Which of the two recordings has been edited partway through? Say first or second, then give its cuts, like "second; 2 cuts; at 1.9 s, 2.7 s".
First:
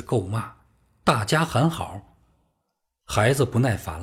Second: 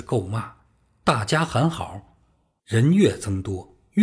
second; 1 cut; at 2.6 s